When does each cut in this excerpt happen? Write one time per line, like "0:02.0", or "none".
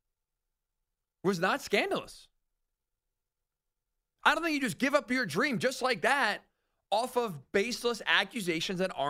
none